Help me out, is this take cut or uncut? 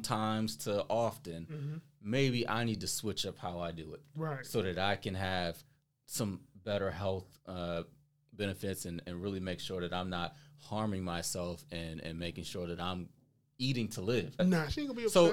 cut